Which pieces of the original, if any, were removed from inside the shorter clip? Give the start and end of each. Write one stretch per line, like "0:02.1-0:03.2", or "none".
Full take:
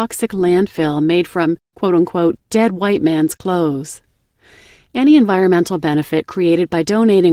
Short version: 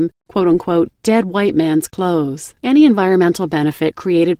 0:04.1-0:04.9